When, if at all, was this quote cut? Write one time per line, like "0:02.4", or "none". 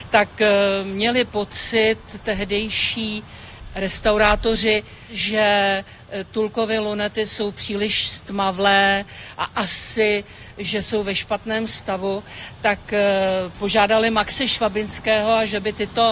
none